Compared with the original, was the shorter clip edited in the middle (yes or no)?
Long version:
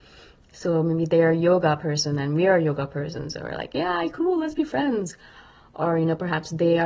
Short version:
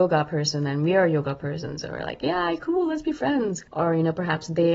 yes